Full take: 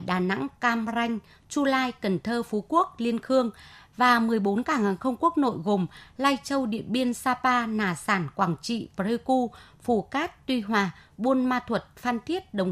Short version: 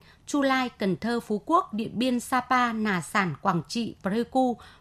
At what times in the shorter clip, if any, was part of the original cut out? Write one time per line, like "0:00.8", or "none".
0:01.7

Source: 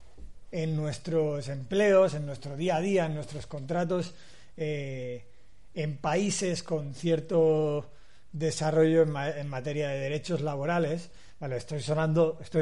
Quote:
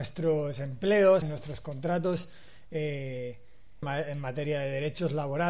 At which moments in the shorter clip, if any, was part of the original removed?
0:01.2
0:03.8

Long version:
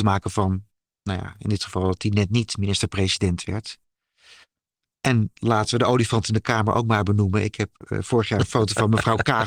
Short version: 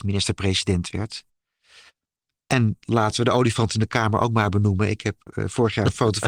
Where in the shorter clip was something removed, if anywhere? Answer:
none

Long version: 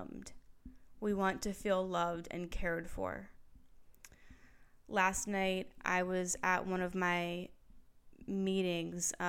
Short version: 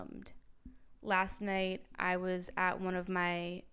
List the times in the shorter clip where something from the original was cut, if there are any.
0:01.0

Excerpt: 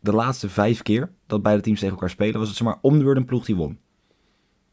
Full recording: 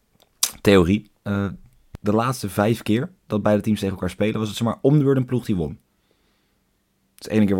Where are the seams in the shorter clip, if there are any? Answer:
none

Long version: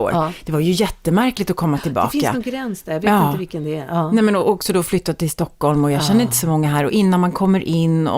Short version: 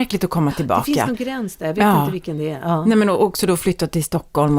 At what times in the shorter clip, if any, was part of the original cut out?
none

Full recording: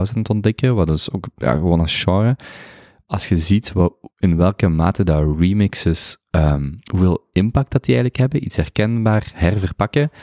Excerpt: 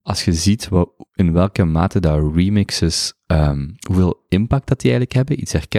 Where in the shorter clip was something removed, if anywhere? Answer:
none

